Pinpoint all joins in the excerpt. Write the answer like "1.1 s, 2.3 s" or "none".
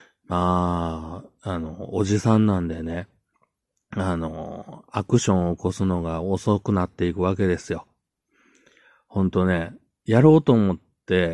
none